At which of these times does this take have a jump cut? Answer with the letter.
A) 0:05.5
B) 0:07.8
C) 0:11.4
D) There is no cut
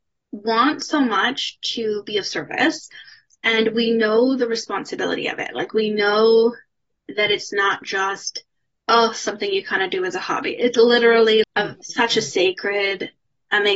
C